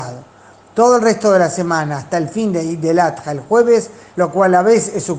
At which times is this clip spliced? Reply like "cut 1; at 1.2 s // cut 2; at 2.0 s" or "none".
cut 1; at 4.1 s